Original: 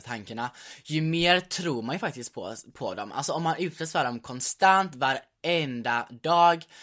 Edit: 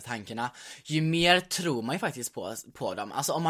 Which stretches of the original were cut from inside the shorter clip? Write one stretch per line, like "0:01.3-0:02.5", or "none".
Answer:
none